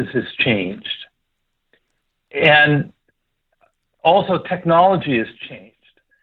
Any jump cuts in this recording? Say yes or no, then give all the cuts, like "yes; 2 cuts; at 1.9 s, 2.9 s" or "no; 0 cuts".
no; 0 cuts